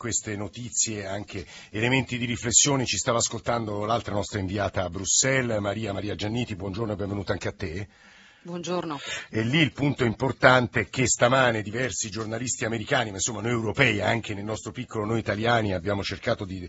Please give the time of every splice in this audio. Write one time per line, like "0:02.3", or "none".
none